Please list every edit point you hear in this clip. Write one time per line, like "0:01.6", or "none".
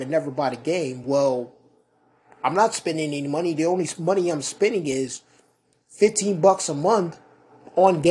none